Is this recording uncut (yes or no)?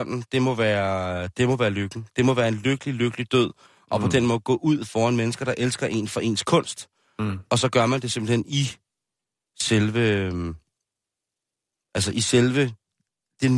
yes